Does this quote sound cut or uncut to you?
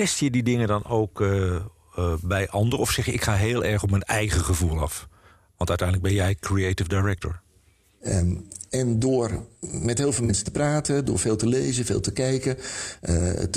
cut